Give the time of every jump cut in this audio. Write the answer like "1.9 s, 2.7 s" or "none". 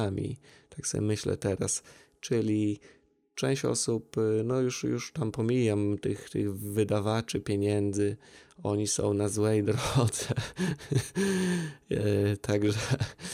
none